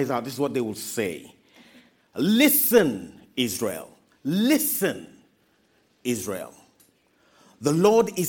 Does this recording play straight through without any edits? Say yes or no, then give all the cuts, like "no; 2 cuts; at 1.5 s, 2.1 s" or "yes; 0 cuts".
yes; 0 cuts